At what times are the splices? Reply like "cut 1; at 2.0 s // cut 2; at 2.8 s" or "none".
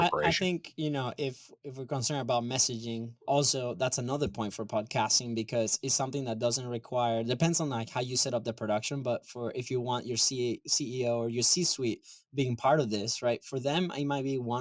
cut 1; at 3.2 s